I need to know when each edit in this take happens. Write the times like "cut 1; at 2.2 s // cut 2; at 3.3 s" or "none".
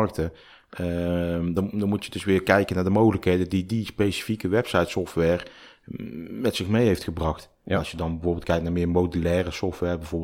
none